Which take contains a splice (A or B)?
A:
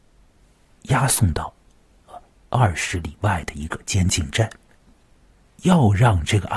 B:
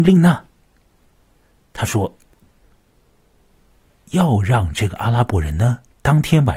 A